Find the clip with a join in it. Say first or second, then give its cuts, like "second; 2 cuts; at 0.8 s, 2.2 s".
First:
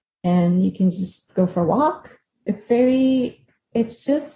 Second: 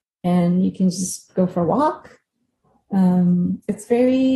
first; 1 cut; at 2.4 s